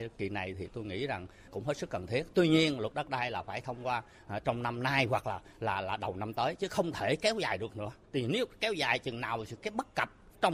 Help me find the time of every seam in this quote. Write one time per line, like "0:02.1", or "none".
none